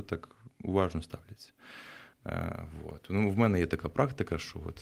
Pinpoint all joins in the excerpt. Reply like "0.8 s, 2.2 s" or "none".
none